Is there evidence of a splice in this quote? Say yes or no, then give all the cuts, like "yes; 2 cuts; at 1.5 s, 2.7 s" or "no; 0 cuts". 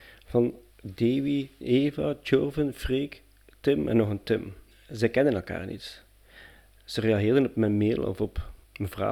yes; 1 cut; at 1.6 s